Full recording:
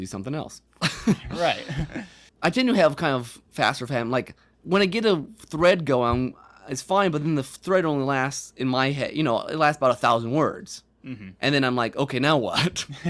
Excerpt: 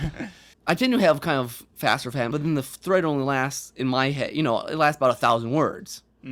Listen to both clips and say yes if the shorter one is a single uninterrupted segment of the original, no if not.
no